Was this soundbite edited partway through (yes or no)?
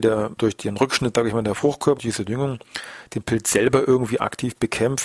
yes